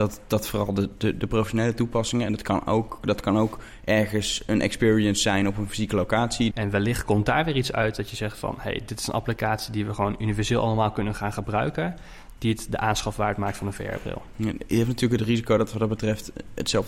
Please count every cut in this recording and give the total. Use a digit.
1